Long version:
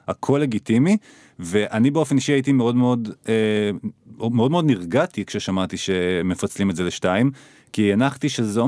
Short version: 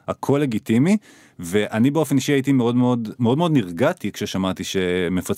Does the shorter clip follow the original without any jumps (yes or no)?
no